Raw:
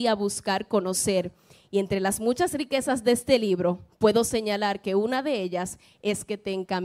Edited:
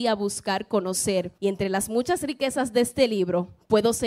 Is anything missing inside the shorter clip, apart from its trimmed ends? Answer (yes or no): yes